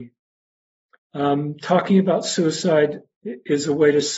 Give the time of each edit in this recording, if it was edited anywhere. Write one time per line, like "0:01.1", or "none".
0:01.0

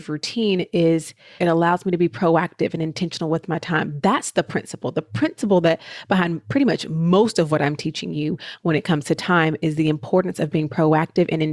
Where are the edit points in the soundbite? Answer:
0:01.4

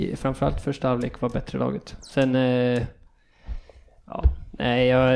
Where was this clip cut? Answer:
none

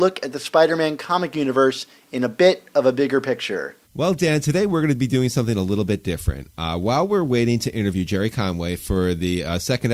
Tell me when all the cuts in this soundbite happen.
0:03.8

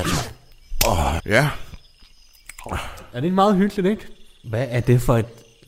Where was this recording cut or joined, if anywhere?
0:01.2
0:04.4

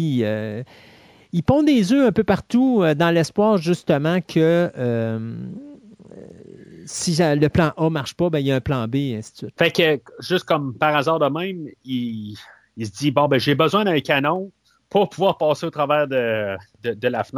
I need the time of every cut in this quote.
0:09.5

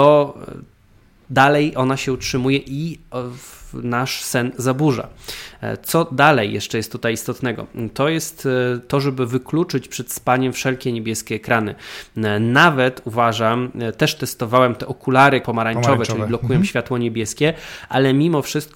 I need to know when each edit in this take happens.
0:15.4

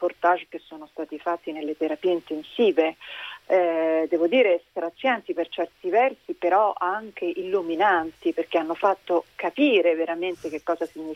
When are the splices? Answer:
none

